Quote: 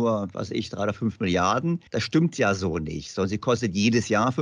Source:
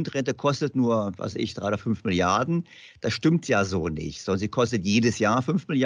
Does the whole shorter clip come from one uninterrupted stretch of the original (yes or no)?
no